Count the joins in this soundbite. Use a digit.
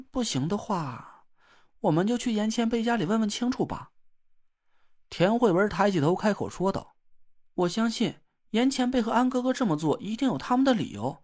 0